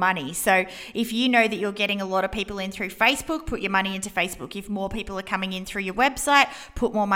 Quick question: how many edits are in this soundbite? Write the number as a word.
zero